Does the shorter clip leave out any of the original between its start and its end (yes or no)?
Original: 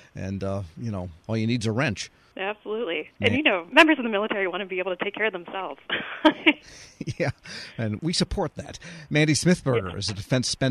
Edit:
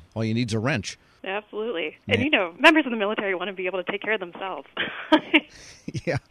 no